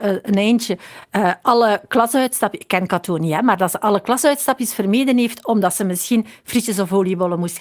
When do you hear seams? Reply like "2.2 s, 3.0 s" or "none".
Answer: none

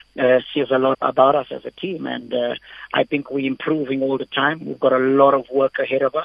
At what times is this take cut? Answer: 0.9 s

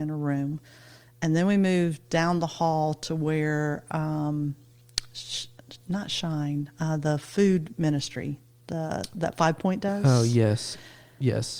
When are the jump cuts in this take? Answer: none

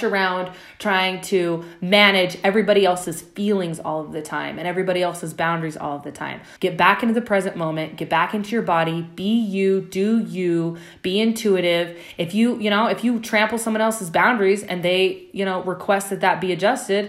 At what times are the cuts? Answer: 6.6 s

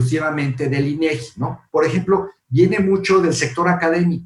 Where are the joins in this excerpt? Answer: 1.7 s

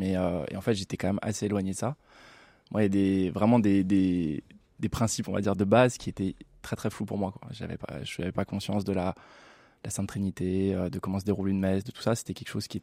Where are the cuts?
none

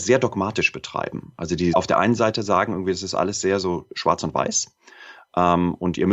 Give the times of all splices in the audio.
none

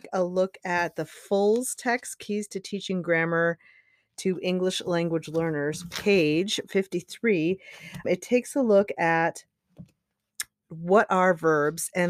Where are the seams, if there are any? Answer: 8.0 s, 10.6 s

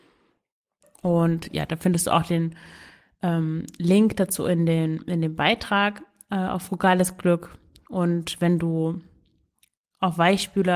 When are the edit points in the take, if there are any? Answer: 0.9 s

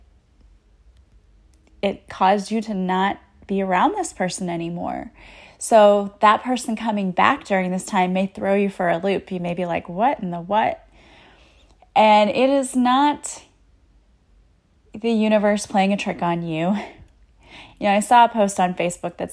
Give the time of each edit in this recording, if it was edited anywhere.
none

